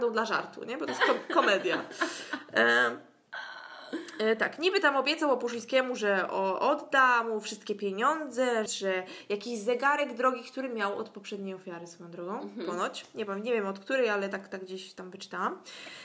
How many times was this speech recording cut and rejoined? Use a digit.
1